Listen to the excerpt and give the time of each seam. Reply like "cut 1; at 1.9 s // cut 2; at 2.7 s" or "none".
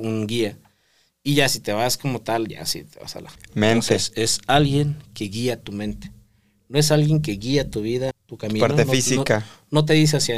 cut 1; at 3.4 s // cut 2; at 8.1 s